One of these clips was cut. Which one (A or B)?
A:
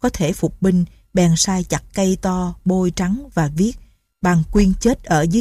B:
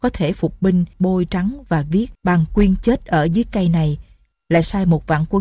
B